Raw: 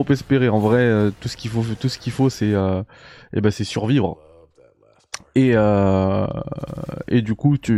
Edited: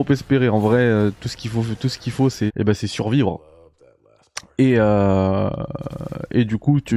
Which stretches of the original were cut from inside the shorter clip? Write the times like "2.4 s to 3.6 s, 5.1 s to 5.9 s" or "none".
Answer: 2.5 s to 3.2 s